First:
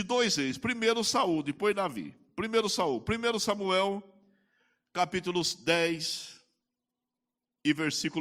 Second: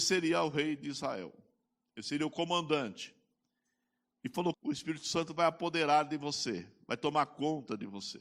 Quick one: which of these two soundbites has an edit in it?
second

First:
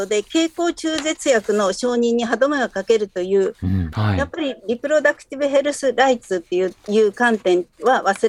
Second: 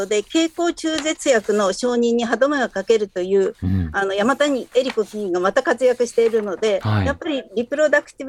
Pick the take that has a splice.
first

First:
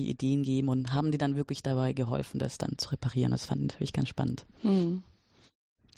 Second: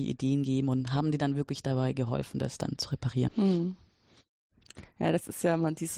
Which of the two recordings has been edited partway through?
second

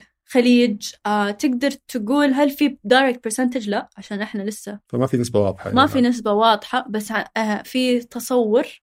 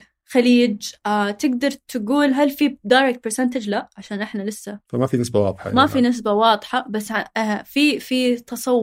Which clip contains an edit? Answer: first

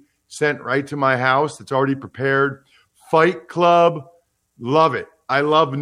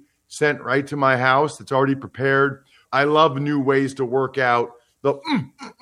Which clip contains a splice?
second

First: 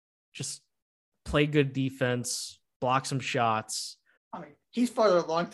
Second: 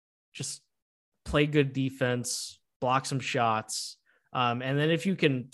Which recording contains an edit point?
first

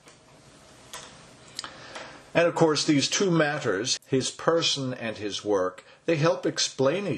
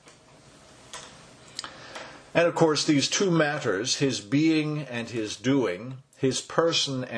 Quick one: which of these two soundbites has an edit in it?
first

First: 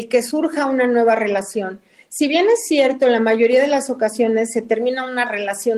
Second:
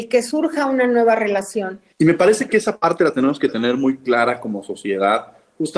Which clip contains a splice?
second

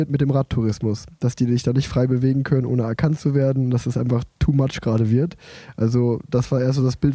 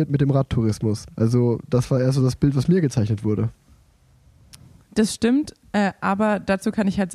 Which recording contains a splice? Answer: second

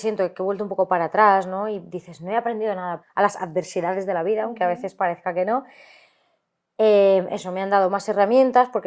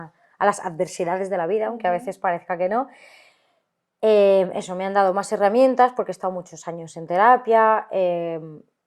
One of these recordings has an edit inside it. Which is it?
first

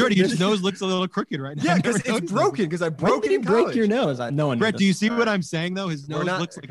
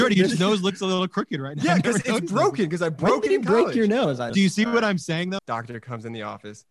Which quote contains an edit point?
second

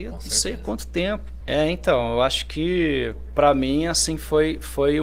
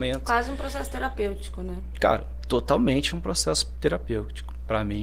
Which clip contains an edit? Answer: first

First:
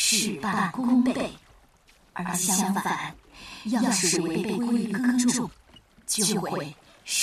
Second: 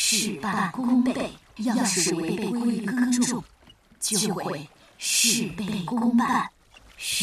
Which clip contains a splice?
second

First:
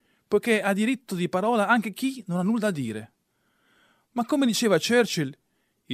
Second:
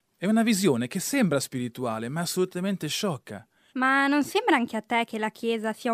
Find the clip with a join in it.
second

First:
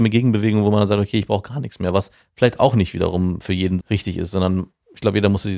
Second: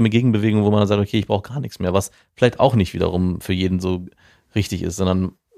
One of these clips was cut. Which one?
first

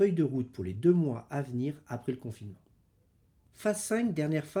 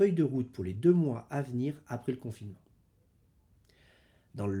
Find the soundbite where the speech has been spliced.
first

